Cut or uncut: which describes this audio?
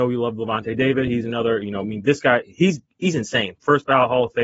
uncut